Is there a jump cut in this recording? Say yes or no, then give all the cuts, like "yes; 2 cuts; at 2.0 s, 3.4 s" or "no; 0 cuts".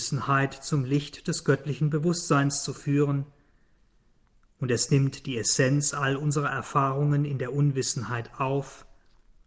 no; 0 cuts